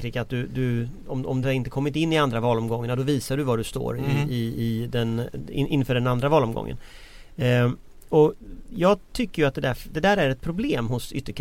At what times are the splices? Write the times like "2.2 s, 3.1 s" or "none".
1.4 s